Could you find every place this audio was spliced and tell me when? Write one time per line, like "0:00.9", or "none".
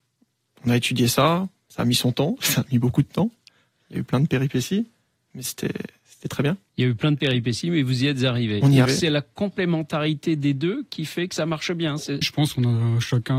0:08.9
0:12.2